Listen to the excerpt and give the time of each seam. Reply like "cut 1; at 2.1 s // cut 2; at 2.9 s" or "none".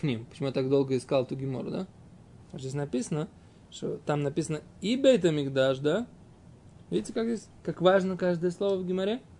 cut 1; at 4.0 s // cut 2; at 6.9 s